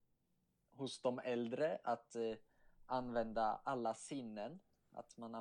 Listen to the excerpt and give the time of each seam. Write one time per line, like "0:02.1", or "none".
none